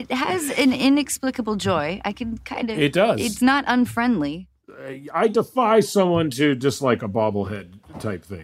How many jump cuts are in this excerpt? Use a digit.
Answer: 0